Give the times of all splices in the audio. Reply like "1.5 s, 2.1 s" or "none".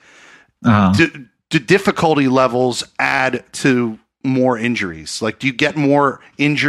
none